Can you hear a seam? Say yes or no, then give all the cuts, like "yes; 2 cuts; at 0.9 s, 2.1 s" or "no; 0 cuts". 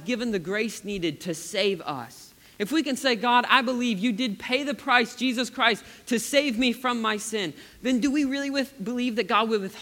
no; 0 cuts